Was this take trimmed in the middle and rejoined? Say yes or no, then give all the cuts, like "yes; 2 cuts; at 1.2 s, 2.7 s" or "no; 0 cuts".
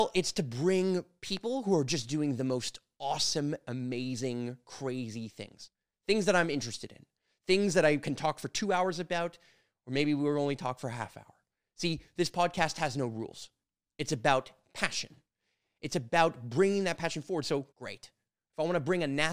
yes; 1 cut; at 17.7 s